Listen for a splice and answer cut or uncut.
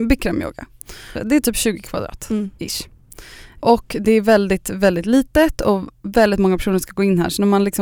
cut